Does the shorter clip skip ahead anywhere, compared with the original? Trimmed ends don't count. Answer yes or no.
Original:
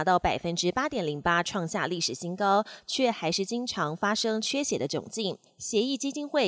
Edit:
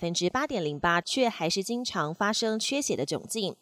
yes